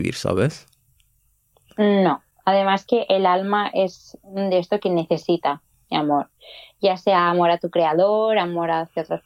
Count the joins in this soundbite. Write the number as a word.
zero